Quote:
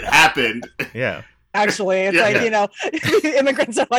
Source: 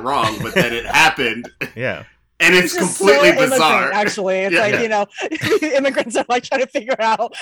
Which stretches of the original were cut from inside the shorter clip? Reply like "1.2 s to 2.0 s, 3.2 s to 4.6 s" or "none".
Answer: 2.4 s to 3.9 s